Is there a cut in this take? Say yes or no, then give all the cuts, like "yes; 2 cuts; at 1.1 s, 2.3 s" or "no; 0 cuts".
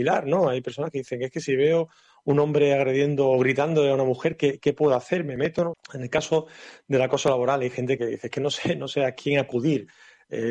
yes; 2 cuts; at 5.7 s, 8.0 s